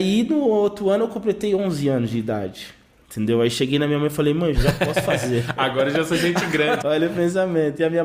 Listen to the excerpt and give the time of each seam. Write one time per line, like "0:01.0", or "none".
0:04.5
0:06.8